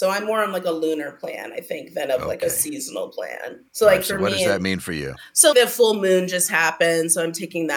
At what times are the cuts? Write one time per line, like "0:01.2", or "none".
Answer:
0:03.7
0:05.5